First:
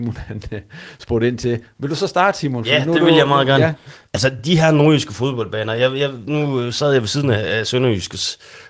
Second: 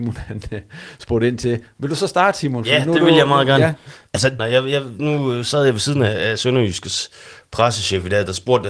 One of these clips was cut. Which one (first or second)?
second